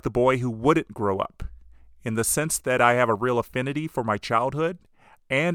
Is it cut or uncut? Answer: uncut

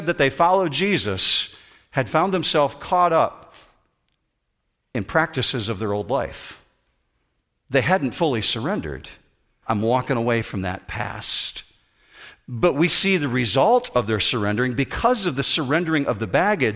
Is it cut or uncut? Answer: cut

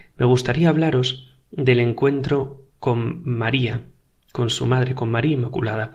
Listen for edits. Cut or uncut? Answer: uncut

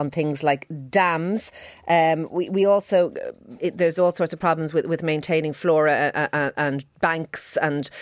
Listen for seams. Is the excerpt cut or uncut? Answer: cut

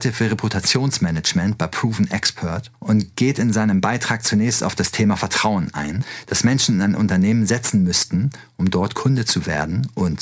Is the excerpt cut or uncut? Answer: uncut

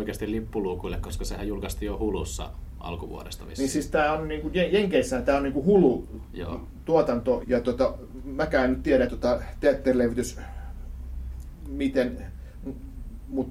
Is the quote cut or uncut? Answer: cut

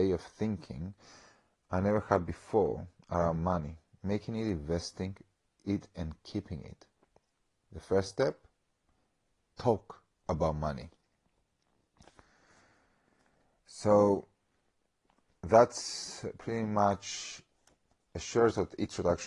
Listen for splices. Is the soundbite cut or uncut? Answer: uncut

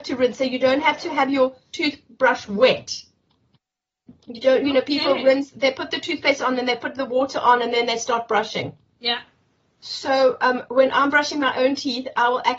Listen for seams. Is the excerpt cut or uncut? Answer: uncut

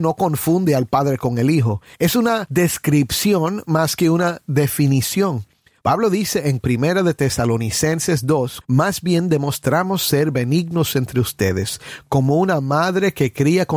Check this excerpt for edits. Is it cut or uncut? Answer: cut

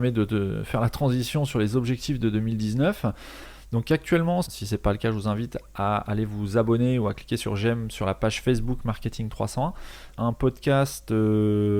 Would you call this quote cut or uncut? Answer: cut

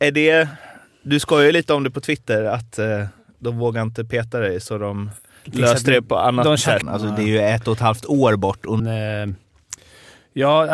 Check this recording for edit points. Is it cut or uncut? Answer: cut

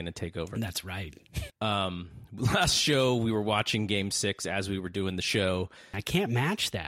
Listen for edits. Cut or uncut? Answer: cut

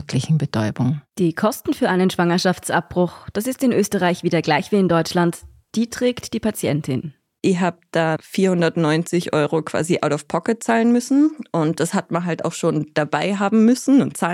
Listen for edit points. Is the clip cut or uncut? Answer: uncut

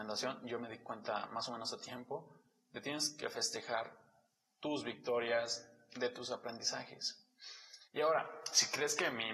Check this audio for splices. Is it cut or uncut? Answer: cut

